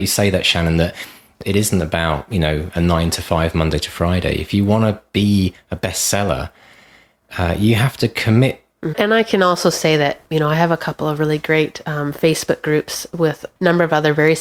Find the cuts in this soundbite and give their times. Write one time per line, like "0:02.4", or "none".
0:08.9